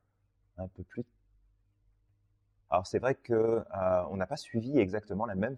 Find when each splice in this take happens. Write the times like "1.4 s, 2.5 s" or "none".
2.7 s